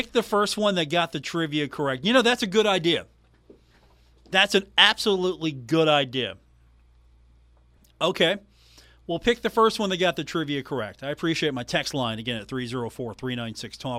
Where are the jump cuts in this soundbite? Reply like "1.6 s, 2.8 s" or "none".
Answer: none